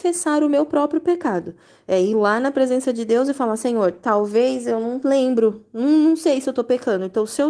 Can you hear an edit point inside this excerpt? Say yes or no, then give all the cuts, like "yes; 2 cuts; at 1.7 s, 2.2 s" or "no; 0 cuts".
no; 0 cuts